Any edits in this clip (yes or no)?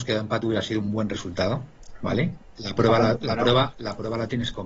yes